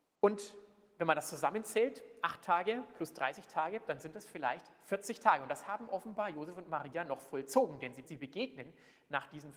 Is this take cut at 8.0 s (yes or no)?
yes